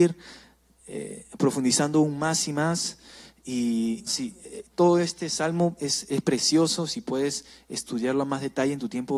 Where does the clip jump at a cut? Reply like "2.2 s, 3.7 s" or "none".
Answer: 4.1 s